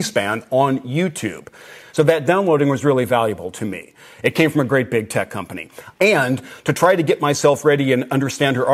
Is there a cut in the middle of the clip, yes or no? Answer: yes